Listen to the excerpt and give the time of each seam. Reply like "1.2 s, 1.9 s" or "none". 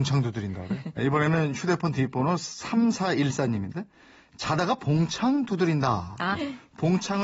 1.0 s, 6.3 s